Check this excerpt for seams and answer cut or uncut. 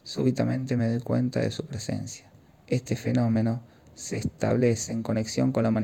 cut